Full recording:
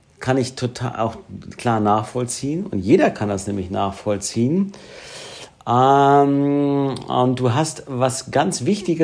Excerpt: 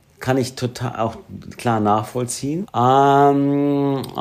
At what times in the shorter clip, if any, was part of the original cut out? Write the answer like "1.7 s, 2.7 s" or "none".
2.6 s